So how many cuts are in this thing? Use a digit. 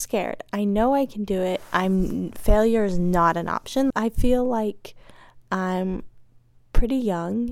1